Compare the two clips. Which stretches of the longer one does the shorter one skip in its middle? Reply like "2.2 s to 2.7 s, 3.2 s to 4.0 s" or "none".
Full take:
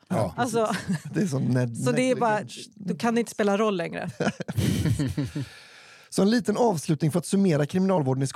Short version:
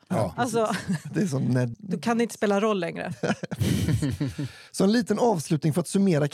1.7 s to 2.7 s, 5.6 s to 6.1 s